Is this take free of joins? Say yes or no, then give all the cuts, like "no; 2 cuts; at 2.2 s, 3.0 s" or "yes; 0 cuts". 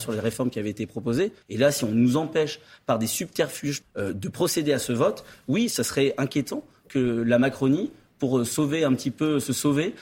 no; 2 cuts; at 1.4 s, 3.8 s